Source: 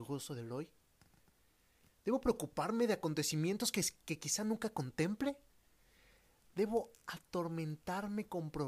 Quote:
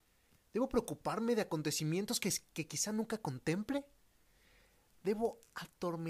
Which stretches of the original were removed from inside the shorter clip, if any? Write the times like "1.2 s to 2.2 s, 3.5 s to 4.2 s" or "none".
none

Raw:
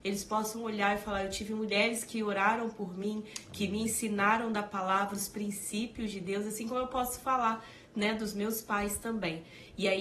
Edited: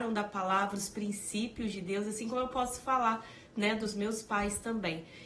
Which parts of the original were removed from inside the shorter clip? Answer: none

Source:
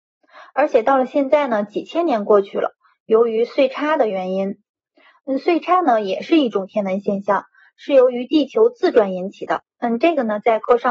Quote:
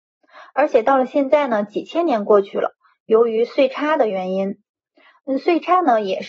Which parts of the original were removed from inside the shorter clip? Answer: none

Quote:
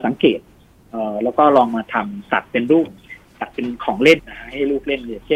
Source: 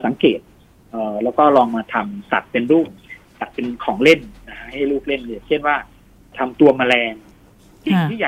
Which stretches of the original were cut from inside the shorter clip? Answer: 4.2 s to 4.4 s

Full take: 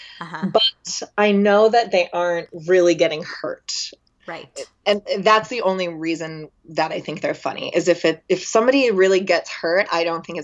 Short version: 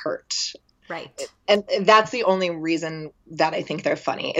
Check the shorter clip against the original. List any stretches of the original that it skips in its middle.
none

